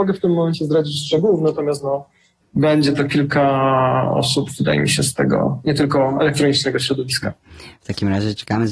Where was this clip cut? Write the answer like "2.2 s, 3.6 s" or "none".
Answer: 2.4 s